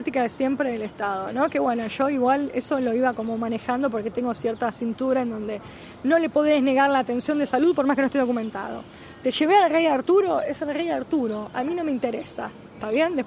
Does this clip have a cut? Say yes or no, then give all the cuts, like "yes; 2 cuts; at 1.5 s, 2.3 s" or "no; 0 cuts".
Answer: no; 0 cuts